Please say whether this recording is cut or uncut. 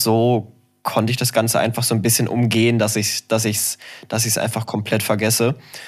uncut